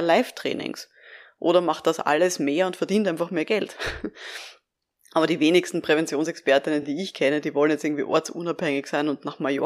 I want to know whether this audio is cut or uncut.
uncut